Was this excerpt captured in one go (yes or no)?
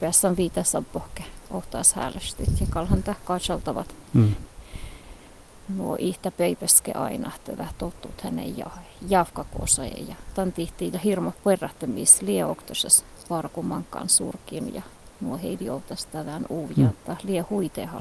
no